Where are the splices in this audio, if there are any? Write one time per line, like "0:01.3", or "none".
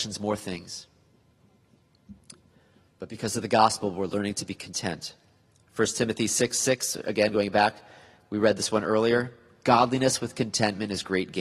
none